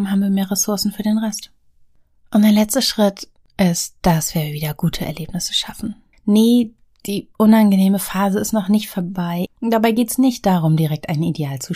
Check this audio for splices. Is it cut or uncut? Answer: cut